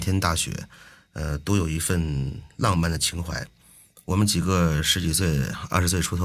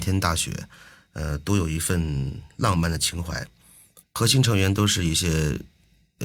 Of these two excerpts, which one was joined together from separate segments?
second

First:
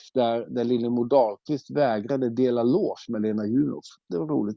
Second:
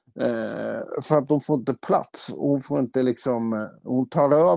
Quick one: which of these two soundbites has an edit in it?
second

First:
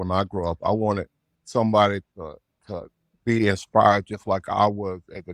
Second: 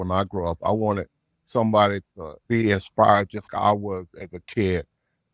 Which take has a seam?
second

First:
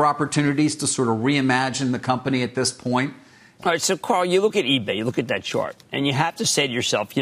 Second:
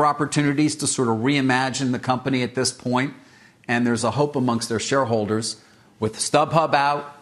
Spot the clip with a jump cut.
first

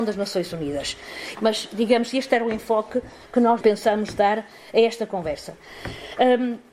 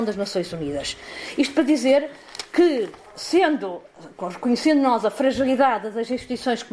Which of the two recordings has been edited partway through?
first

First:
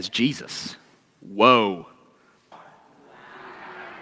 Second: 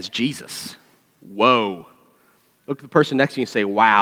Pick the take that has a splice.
first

